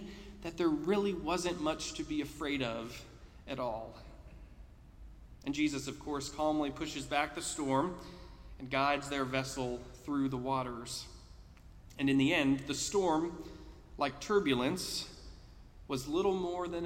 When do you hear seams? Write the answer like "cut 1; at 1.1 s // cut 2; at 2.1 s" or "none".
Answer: none